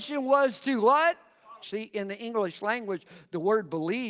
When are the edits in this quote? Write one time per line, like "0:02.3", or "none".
0:01.6